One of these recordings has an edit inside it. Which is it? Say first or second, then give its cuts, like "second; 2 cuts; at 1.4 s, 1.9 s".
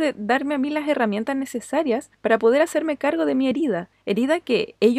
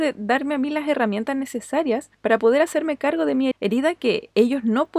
second; 1 cut; at 3.5 s